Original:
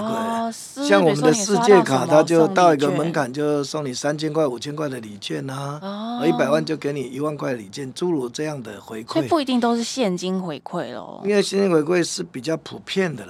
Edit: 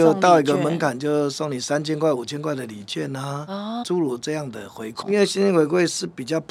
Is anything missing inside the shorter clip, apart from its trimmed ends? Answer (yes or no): yes